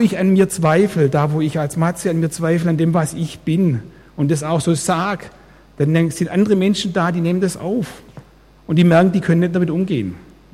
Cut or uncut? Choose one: uncut